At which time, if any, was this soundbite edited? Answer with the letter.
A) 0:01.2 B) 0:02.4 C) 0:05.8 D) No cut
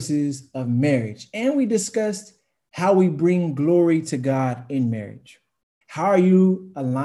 C